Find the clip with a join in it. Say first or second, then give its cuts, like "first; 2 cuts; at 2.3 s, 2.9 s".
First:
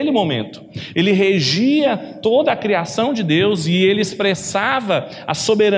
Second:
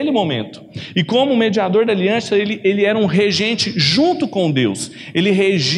first; 1 cut; at 0.9 s